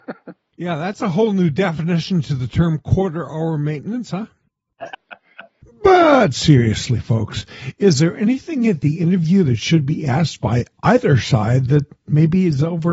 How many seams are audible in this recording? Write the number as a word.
one